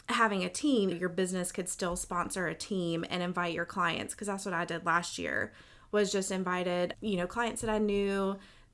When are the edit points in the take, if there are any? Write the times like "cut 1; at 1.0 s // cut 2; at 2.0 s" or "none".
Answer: cut 1; at 0.9 s // cut 2; at 6.9 s

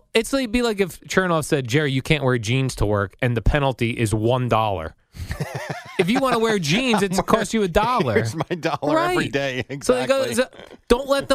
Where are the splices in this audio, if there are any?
none

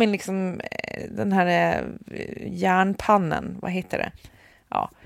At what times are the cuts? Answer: none

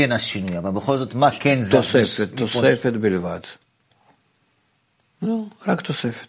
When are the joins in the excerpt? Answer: none

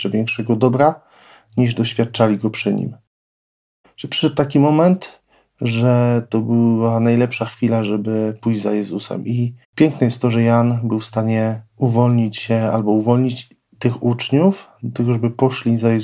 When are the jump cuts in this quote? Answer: cut 1; at 3.8 s // cut 2; at 9.6 s // cut 3; at 11.7 s

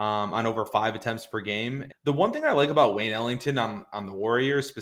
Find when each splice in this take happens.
cut 1; at 1.9 s

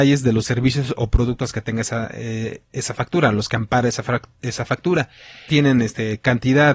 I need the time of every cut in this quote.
cut 1; at 5.5 s

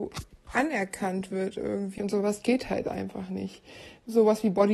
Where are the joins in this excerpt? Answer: cut 1; at 2.0 s

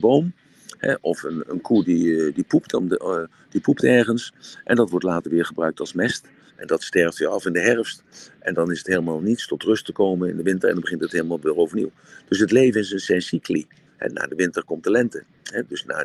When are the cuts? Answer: cut 1; at 6.5 s // cut 2; at 13.9 s

